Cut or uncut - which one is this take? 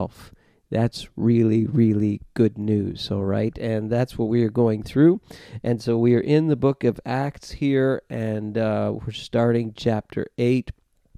uncut